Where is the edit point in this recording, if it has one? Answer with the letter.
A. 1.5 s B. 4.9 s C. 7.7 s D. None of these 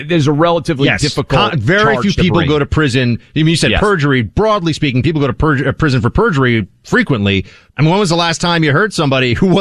C